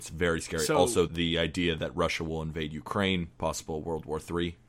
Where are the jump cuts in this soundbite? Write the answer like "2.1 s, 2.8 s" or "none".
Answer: 1.1 s, 3.3 s